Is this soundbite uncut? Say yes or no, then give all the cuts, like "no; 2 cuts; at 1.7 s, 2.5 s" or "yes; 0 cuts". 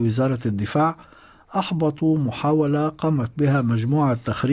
yes; 0 cuts